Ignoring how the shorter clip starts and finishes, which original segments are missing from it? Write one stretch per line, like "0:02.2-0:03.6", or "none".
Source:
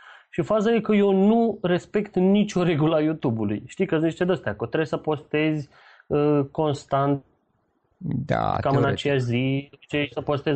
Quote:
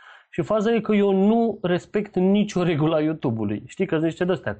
none